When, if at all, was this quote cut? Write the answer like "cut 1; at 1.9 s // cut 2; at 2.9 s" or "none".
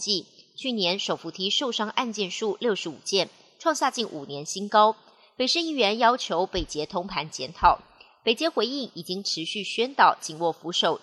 none